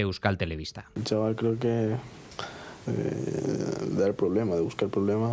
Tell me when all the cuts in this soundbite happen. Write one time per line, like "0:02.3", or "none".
0:02.9

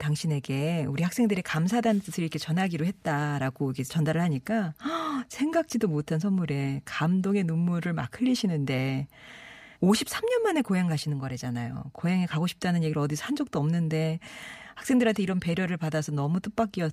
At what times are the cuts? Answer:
0:09.7

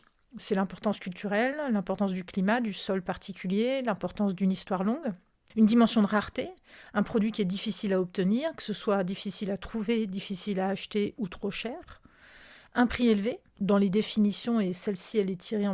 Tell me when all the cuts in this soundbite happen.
none

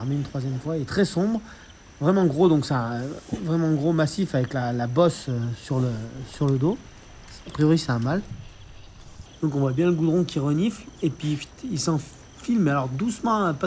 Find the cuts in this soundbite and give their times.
0:09.3

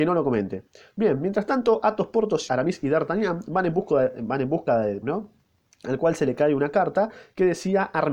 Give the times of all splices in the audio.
0:02.5
0:05.0

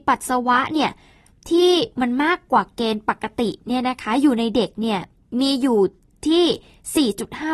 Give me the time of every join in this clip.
none

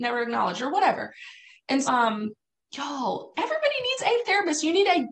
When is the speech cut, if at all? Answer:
0:01.8
0:03.3

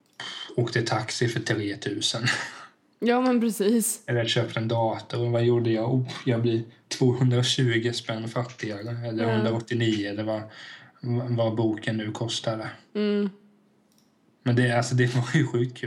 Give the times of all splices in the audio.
none

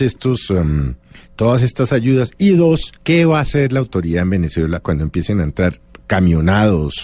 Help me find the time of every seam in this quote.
0:03.0
0:06.0

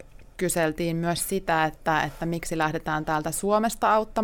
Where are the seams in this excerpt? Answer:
none

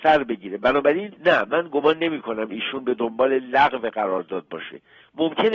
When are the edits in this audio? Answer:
0:01.2

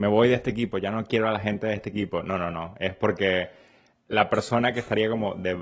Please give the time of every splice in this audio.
none

